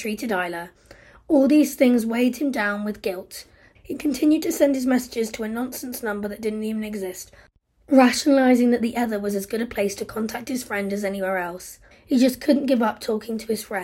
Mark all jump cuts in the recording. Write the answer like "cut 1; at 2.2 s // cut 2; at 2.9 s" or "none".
cut 1; at 3.7 s // cut 2; at 11.9 s